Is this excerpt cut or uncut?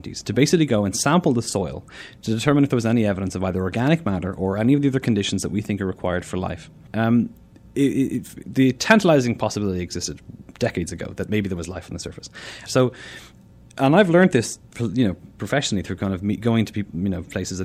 cut